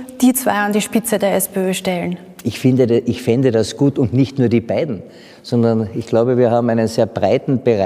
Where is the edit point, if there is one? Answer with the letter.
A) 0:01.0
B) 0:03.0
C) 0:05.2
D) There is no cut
D